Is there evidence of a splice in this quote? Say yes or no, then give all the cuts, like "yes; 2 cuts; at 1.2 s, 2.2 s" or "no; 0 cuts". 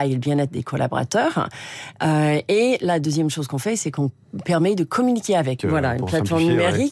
yes; 1 cut; at 5.6 s